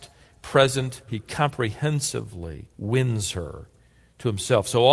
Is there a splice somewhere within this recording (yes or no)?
yes